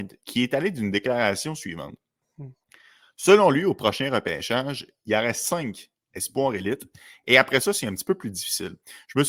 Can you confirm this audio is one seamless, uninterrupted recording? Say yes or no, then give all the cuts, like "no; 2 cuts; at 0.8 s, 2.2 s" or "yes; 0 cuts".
yes; 0 cuts